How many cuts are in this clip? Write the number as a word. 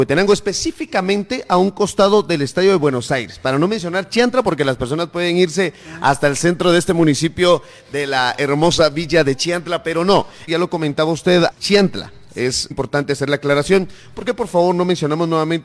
three